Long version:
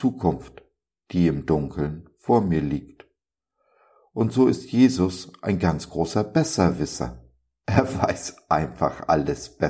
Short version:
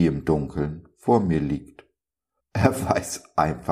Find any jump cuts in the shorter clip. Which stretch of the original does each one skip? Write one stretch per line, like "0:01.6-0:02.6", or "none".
0:03.6-0:07.5